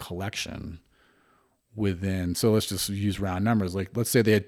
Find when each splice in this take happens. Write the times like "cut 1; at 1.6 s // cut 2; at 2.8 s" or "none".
none